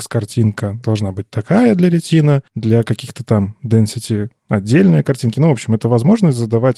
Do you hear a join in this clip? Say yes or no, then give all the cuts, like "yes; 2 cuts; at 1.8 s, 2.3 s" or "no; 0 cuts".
no; 0 cuts